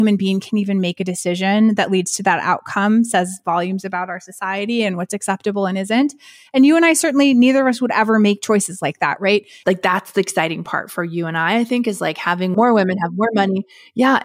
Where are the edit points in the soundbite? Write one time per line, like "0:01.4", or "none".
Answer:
0:09.6